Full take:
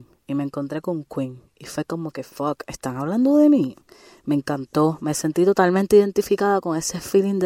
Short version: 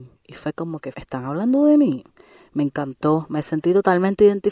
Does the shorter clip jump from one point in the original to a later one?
yes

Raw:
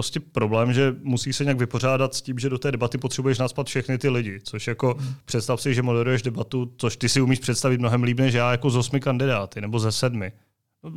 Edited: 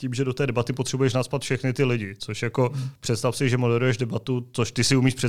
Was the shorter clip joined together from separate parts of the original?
no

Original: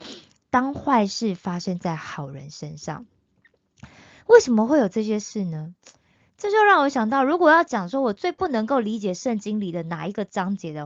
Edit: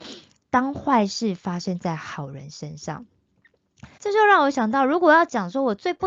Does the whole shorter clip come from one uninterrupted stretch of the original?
no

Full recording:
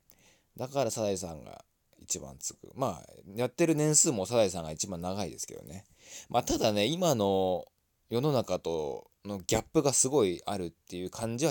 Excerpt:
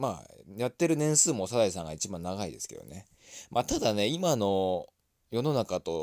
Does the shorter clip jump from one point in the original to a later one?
no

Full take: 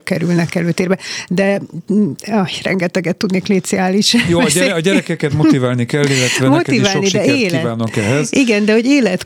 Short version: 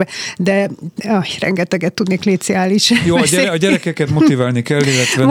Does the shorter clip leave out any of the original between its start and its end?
yes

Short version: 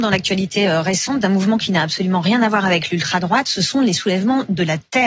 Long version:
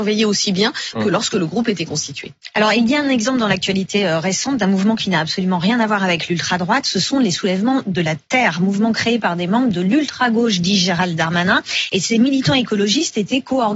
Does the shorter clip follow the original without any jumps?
yes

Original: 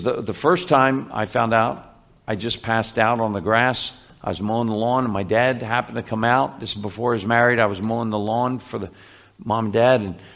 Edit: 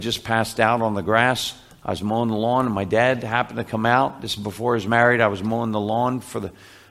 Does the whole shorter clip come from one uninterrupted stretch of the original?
yes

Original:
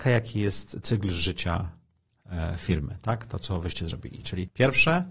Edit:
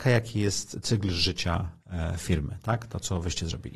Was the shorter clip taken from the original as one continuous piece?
no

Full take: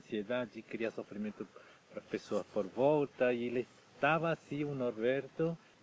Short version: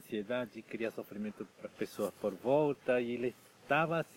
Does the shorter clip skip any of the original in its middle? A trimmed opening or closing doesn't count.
yes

